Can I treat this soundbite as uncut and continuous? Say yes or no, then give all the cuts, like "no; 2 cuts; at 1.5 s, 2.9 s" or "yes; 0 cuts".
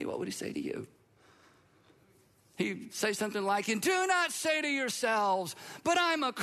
yes; 0 cuts